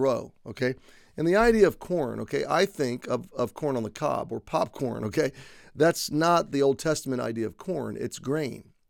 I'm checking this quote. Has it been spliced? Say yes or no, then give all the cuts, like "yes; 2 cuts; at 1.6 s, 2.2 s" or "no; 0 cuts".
no; 0 cuts